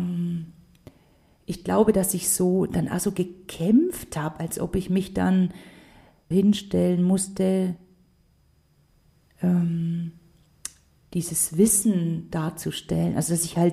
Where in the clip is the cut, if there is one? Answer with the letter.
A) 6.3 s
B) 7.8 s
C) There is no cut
A